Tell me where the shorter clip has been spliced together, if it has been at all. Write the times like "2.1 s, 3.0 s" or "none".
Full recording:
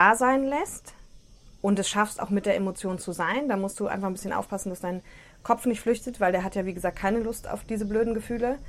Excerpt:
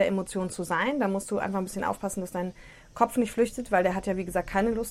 none